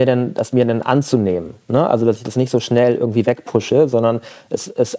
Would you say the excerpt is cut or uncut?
uncut